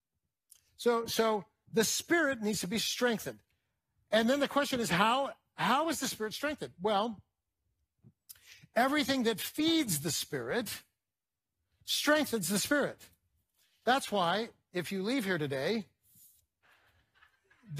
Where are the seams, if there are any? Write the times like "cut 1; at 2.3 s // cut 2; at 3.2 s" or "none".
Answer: cut 1; at 16.6 s